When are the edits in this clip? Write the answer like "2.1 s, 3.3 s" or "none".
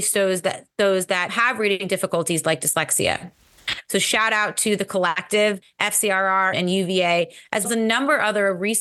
3.8 s, 6.5 s, 7.6 s